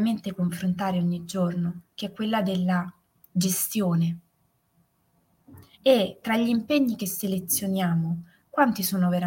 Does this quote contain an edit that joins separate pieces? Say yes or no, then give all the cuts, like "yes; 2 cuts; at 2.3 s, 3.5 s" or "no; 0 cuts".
yes; 1 cut; at 5.7 s